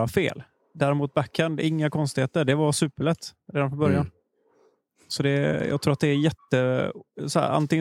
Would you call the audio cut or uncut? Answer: uncut